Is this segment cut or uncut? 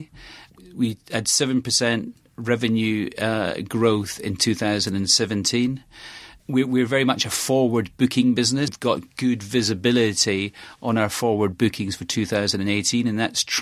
cut